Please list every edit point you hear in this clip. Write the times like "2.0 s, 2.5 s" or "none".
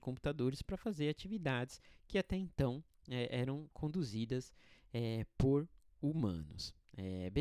none